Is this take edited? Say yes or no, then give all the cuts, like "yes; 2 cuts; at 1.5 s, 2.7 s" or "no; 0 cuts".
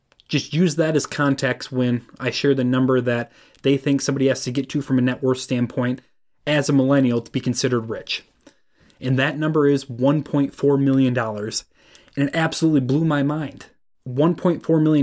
no; 0 cuts